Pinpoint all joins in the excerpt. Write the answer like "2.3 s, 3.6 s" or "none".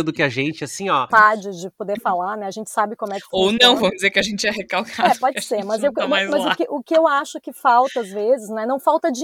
1.1 s